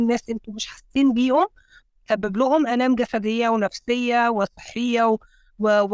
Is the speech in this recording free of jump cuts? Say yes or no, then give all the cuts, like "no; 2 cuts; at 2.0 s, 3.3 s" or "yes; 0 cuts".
yes; 0 cuts